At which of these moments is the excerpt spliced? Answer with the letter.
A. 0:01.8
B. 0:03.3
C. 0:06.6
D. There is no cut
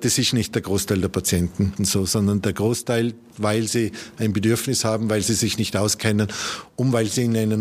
B